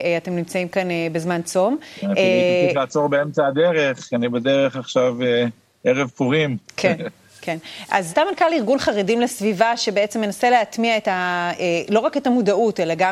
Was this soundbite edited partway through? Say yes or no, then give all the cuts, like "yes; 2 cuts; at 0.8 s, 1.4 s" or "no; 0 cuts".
yes; 1 cut; at 8.1 s